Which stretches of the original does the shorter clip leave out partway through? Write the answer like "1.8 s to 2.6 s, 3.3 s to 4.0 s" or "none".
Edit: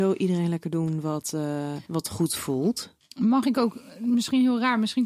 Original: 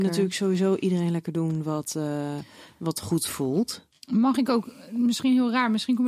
2.5 s to 2.8 s